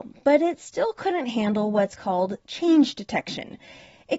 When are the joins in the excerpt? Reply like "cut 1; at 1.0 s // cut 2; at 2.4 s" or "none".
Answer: none